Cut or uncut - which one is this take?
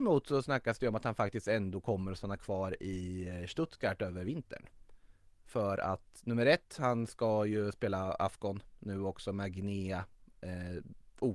uncut